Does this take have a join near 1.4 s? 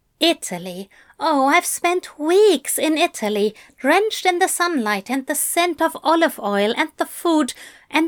no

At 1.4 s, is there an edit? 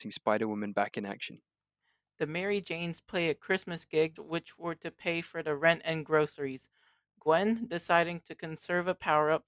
no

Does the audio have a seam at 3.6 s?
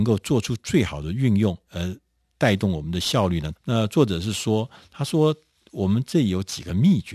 yes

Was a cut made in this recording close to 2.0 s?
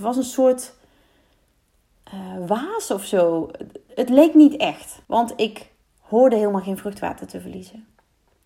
no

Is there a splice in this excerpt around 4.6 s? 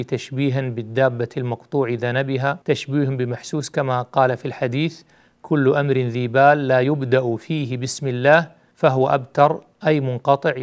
no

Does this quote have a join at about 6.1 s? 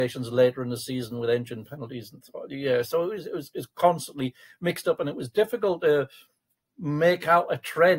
no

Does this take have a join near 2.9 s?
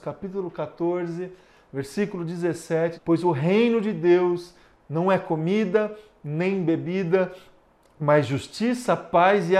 yes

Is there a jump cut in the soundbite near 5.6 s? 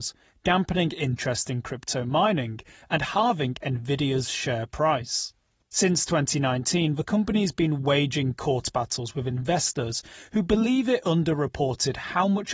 yes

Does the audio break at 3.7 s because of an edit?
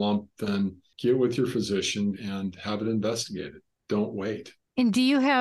no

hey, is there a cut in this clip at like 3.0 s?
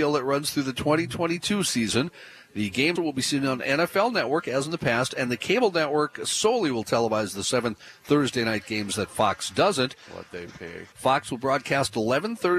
yes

